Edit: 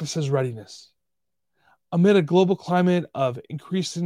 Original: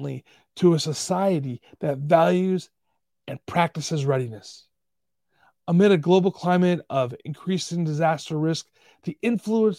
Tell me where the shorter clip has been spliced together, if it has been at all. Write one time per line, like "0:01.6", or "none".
none